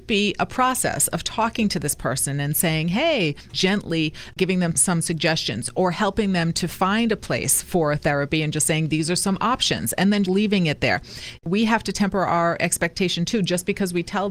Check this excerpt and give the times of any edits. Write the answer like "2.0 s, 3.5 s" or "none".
10.2 s, 11.4 s